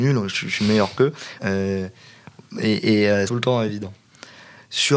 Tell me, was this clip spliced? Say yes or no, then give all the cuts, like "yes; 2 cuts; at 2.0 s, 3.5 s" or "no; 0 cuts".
yes; 2 cuts; at 1.4 s, 3.3 s